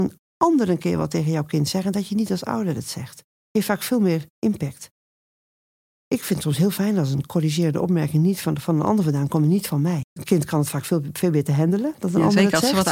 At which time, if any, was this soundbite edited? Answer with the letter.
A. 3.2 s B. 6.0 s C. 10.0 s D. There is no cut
C